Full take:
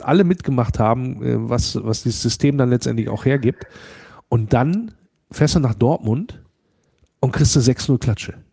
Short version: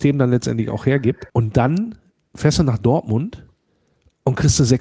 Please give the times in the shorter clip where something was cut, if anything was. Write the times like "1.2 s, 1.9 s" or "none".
1.3 s